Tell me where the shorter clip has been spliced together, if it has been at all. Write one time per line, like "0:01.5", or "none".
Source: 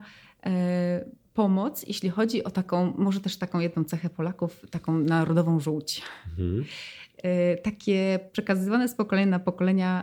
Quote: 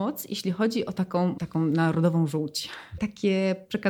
0:01.4
0:03.0